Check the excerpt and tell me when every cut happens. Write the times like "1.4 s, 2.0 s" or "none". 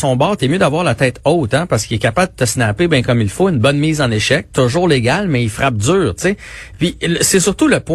none